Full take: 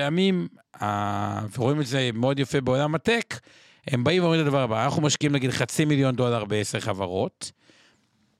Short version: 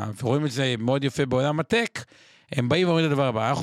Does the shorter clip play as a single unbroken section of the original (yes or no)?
yes